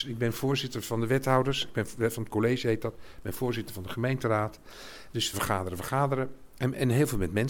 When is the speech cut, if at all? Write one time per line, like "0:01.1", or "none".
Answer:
0:05.3